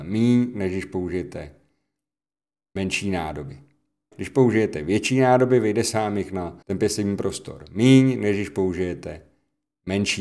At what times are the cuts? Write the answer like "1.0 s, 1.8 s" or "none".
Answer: 4.1 s, 6.6 s